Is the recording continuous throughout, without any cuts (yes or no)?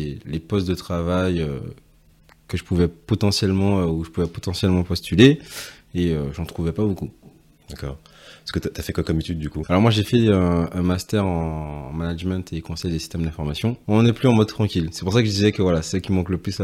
no